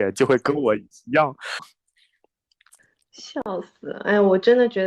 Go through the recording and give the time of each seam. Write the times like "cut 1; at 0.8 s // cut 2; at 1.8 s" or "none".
cut 1; at 1.6 s